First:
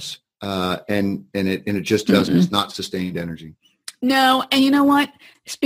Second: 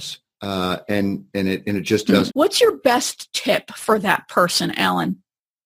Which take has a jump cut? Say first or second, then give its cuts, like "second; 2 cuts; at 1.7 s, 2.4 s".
second; 1 cut; at 2.3 s